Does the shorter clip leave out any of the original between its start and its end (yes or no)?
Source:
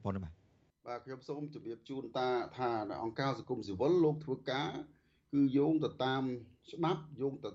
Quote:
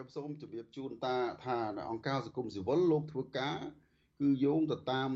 no